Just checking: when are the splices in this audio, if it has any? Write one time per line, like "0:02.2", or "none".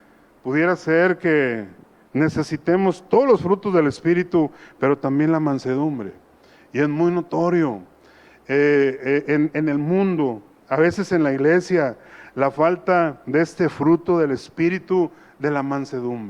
0:09.5